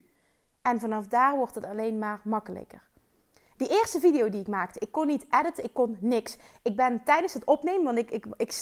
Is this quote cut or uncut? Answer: uncut